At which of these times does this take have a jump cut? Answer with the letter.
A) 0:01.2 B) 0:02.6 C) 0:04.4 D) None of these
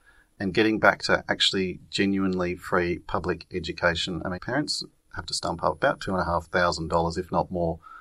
C